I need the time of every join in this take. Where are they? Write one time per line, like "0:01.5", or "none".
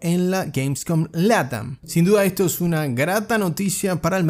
0:01.8